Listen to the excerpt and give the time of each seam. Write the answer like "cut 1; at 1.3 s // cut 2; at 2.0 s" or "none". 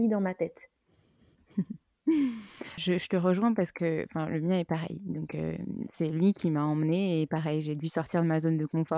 cut 1; at 2.8 s